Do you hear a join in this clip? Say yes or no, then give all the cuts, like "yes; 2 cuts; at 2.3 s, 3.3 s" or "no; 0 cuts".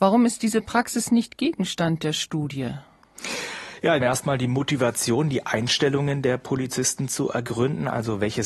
yes; 1 cut; at 4.0 s